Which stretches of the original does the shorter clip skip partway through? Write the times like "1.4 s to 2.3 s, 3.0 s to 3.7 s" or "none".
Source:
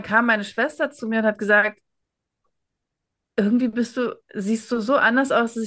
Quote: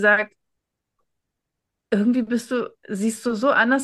none